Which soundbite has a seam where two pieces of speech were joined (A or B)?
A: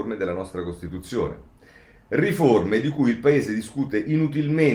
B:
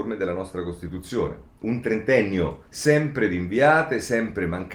B